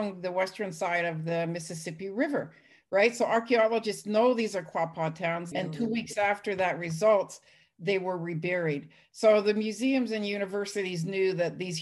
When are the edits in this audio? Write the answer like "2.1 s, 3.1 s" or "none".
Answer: 5.5 s